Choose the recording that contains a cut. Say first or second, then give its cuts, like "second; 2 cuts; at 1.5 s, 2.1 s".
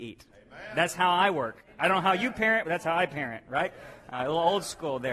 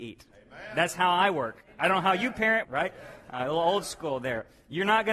second; 1 cut; at 2.6 s